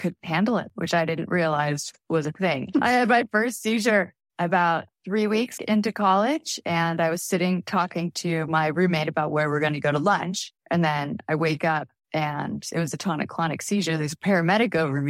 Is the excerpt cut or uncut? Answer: cut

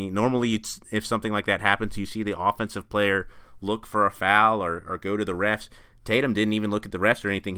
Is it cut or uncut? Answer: uncut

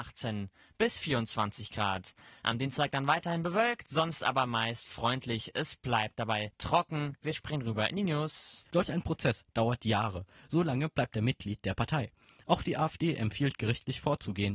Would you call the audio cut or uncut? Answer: cut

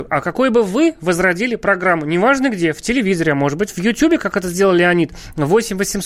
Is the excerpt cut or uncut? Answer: uncut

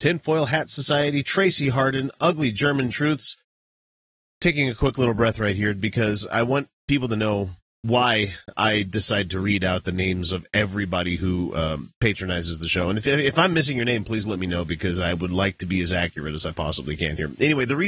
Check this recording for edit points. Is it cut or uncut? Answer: uncut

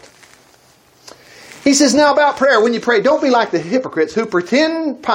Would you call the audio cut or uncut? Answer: uncut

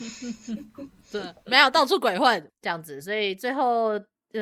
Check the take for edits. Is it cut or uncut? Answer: cut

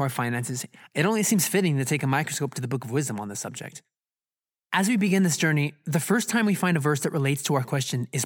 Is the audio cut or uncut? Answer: uncut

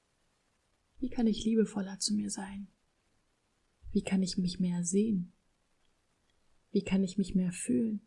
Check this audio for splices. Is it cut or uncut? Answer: uncut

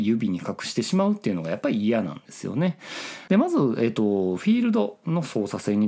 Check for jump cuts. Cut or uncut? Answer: cut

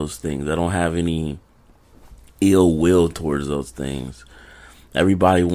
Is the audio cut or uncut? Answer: uncut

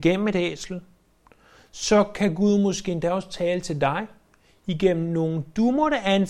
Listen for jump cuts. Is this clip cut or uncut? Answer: uncut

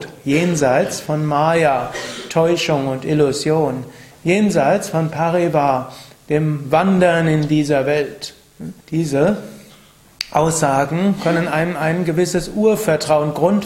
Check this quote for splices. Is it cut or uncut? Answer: cut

